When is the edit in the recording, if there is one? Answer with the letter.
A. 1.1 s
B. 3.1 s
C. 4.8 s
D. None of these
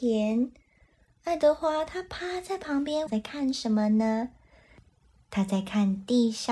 B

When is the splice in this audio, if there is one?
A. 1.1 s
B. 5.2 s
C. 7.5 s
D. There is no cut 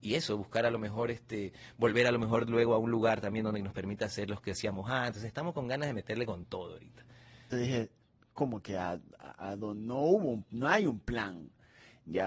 C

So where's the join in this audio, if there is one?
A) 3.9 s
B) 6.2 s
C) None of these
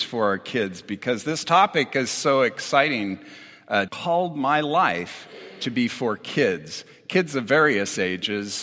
A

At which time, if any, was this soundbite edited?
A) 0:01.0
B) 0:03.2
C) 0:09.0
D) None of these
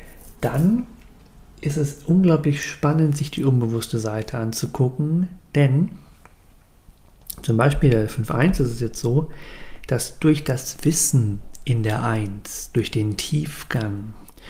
D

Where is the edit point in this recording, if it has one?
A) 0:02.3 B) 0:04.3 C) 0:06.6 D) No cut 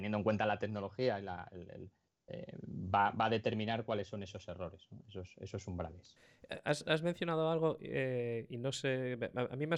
A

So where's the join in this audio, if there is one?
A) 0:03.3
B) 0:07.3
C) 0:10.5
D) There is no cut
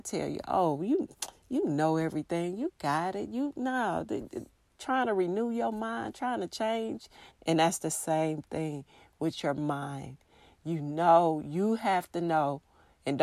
B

